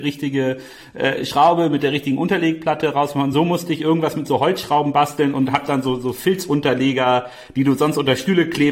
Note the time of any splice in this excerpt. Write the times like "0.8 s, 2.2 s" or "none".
none